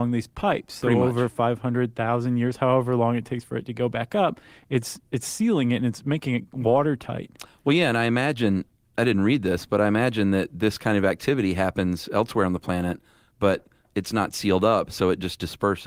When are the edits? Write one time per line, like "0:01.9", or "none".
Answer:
none